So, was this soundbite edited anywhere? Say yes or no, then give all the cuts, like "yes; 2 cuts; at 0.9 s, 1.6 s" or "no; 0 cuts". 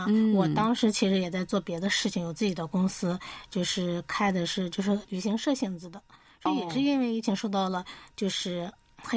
yes; 1 cut; at 5.0 s